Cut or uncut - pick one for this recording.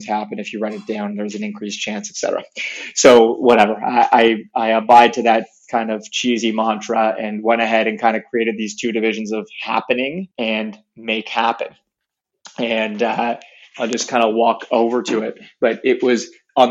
cut